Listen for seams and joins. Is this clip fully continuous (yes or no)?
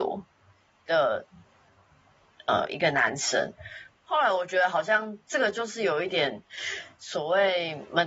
no